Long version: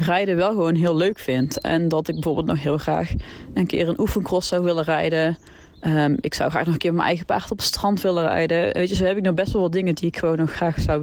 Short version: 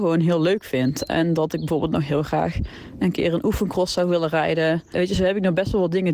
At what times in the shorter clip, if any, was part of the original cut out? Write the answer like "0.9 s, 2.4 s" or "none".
4.9 s